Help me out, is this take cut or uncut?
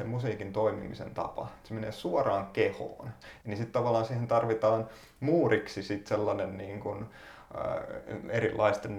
cut